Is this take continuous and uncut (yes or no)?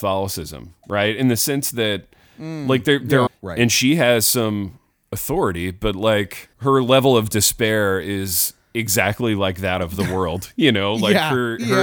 no